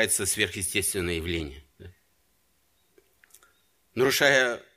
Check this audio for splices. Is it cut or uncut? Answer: uncut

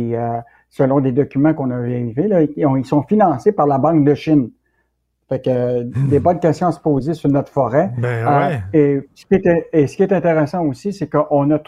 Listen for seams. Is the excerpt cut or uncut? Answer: uncut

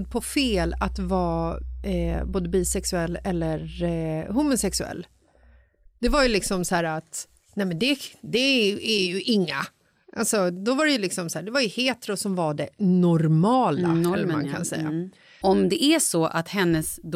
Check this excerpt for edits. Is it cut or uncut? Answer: cut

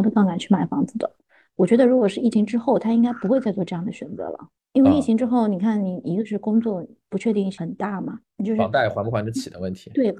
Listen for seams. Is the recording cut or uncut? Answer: uncut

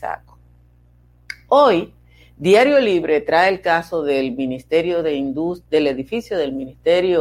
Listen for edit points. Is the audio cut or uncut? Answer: uncut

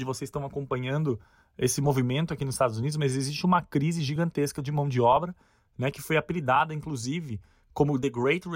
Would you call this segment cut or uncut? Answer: uncut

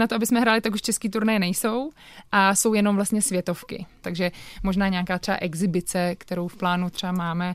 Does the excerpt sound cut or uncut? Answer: cut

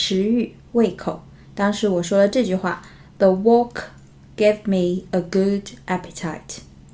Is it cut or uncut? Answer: uncut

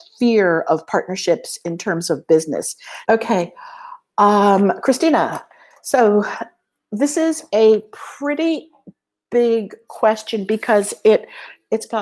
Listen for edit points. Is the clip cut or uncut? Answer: cut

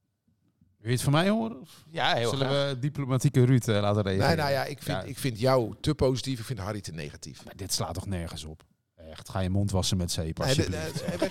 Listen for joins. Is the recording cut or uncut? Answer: uncut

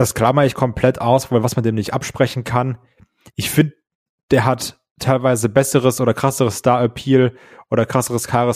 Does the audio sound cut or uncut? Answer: uncut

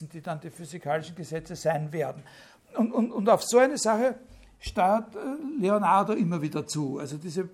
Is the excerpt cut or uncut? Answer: uncut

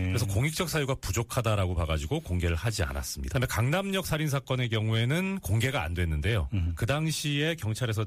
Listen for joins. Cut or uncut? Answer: cut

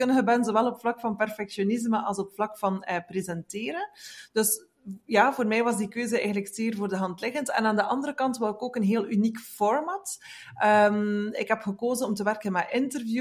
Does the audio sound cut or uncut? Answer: uncut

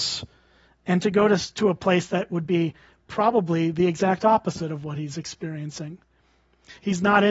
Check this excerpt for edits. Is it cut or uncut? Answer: uncut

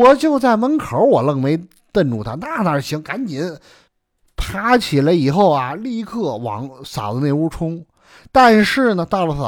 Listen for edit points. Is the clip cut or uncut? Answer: uncut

